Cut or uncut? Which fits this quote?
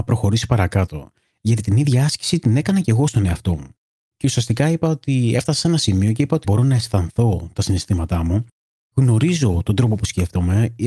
cut